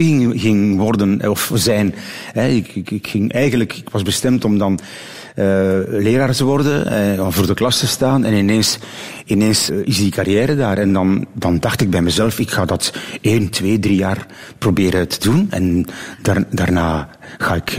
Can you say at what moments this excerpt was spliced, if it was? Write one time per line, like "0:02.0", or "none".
0:09.7

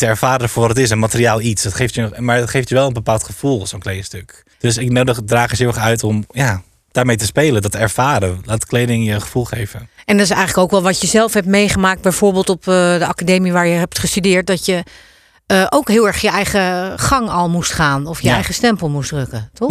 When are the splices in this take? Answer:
0:04.5

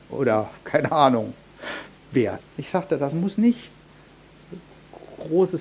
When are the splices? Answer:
0:02.4

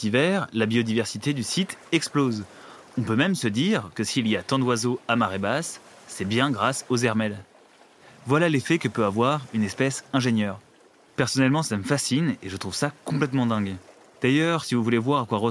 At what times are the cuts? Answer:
none

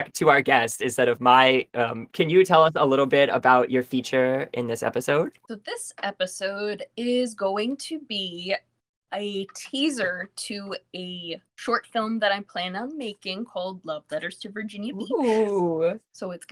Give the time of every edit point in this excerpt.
0:02.1
0:05.5
0:11.5

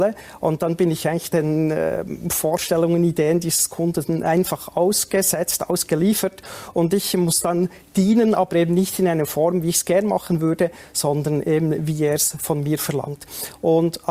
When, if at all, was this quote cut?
0:01.3

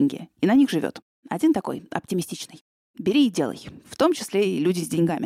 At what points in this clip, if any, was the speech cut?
0:01.1
0:03.8

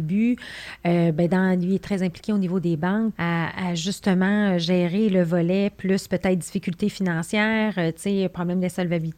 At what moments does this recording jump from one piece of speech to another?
0:03.1

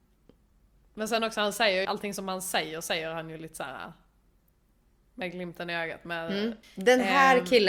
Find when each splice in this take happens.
0:01.8
0:06.6

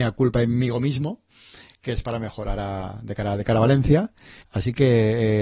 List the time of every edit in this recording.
0:04.4

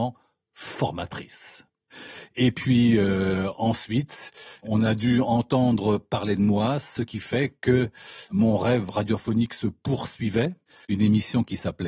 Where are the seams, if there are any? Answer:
0:10.8

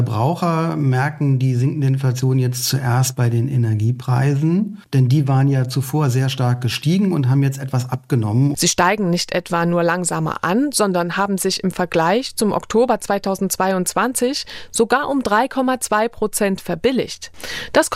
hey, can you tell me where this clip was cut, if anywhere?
0:08.5

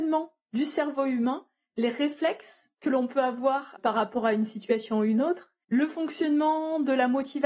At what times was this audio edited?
0:05.6

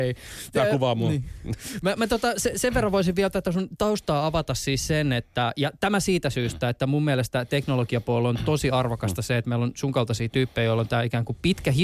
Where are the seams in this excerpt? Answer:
none

